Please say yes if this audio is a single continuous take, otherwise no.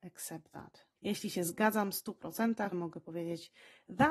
no